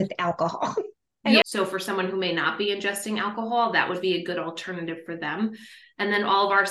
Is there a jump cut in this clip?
yes; 1 cut; at 1.4 s

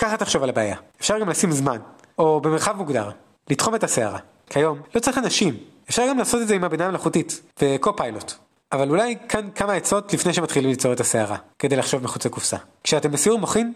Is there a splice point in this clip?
no; 0 cuts

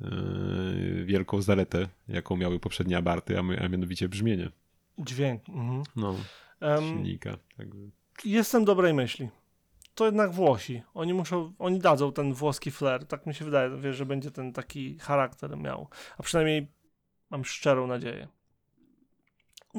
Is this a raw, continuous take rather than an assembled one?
yes; 0 cuts

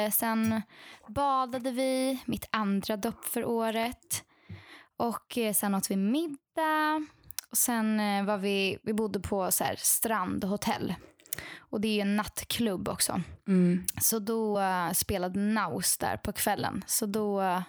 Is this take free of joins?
yes; 0 cuts

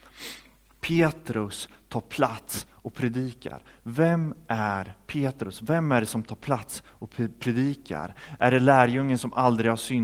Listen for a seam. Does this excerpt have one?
no; 0 cuts

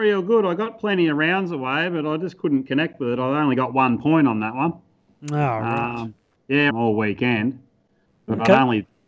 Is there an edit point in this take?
yes; 1 cut; at 6.7 s

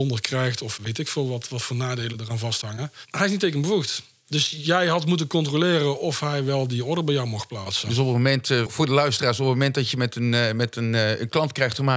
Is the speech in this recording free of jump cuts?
no; 1 cut; at 8.7 s

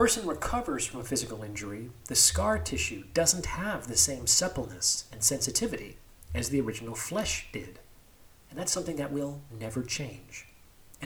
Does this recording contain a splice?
no; 0 cuts

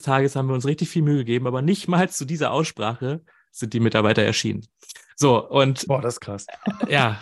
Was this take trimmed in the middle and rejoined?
yes; 1 cut; at 5.9 s

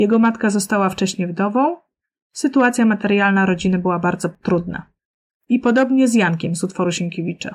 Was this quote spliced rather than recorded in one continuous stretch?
no; 0 cuts

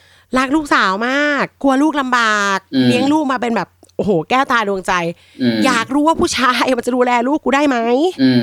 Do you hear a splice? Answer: no; 0 cuts

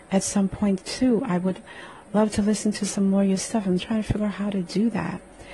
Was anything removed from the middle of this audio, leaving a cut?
yes; 1 cut; at 3.8 s

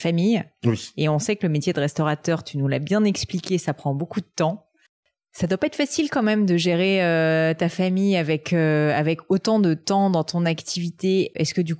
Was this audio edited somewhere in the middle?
no; 0 cuts

